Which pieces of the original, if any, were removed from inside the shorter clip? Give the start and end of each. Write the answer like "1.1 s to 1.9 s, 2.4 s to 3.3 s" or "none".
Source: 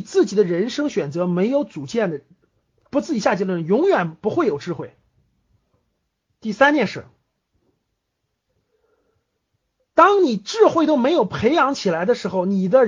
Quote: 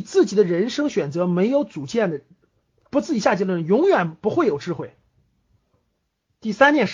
none